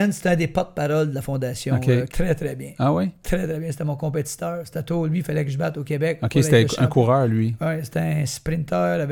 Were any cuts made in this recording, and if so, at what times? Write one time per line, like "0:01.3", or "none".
0:02.1